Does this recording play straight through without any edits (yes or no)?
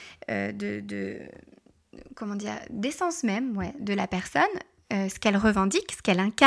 no